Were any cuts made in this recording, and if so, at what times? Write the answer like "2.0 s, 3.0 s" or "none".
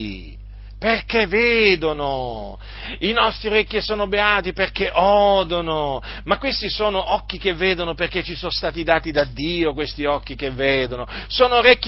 none